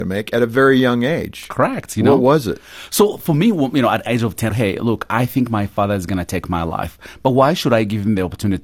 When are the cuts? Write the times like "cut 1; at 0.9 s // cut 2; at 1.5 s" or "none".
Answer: cut 1; at 4.5 s